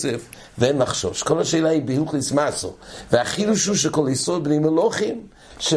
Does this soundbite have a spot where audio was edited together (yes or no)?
no